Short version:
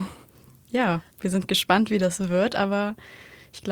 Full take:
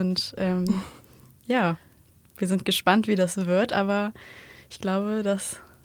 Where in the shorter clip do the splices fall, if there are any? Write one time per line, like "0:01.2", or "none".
0:01.1